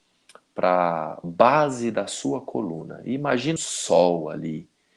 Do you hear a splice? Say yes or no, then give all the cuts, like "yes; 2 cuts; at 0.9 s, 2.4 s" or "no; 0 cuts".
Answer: yes; 1 cut; at 3.6 s